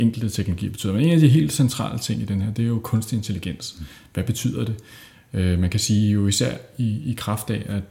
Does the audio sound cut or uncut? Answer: uncut